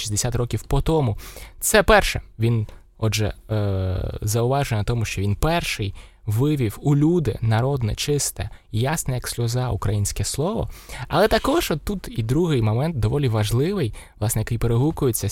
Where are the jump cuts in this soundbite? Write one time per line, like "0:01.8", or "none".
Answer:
none